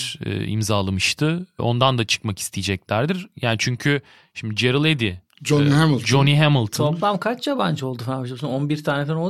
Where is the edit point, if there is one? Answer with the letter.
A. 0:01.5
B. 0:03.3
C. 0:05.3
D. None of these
C